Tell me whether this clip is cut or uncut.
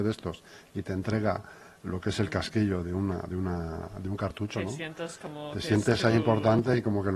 uncut